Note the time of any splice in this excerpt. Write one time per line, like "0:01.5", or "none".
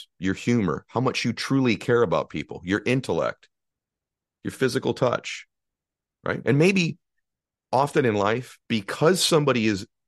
0:06.4
0:08.6